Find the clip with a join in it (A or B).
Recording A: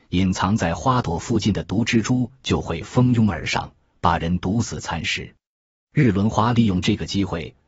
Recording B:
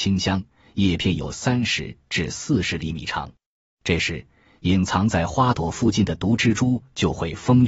B